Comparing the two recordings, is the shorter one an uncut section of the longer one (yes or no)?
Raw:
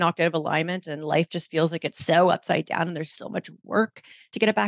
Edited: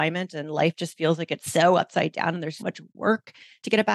no